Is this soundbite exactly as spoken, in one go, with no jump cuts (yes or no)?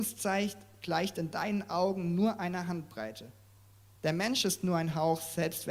no